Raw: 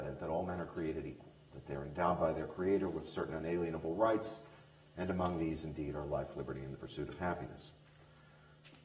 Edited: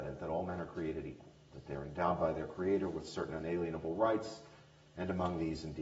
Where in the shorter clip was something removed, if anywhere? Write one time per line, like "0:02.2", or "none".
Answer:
none